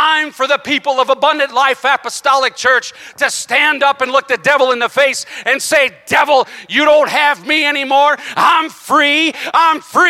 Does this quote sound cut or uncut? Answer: uncut